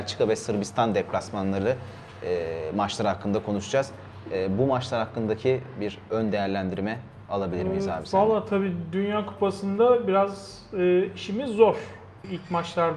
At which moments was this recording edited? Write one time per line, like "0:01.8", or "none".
none